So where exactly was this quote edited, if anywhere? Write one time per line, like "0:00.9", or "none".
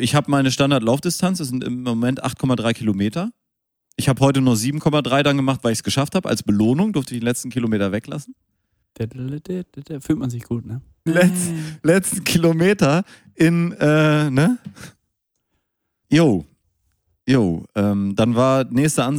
0:08.8
0:11.1
0:16.0